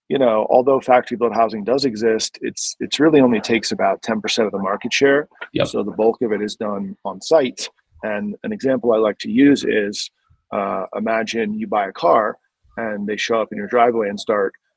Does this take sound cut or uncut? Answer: uncut